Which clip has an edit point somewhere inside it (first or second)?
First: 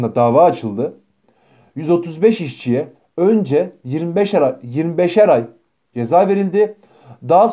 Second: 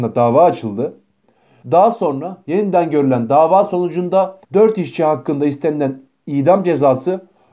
second